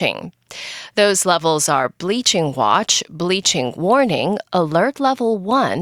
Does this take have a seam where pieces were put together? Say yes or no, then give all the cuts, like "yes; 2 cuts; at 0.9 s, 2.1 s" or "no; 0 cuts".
no; 0 cuts